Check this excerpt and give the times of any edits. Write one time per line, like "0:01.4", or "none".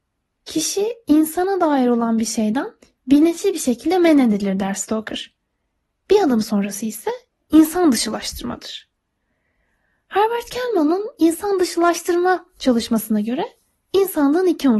none

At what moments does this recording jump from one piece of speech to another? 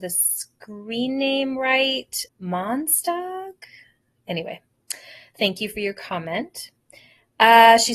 0:02.3

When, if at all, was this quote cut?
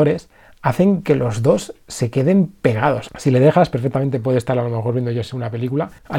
0:03.1

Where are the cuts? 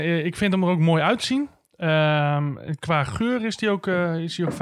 none

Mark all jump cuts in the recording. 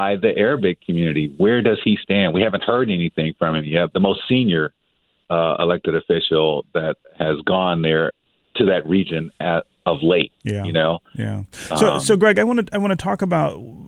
0:03.9

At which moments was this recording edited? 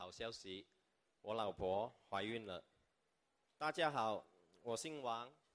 0:03.4

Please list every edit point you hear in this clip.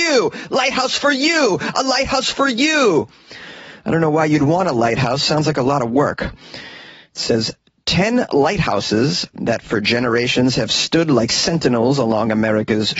none

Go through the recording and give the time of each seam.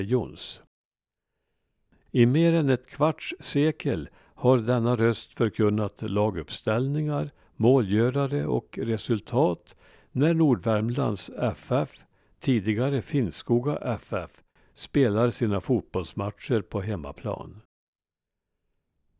none

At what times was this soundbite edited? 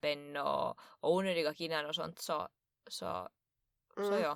none

